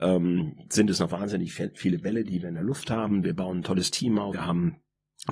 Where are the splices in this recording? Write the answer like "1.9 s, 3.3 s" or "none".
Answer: 4.3 s